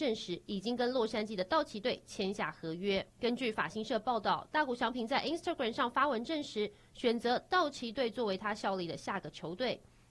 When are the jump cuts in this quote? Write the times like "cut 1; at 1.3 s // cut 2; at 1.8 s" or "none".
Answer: cut 1; at 3.1 s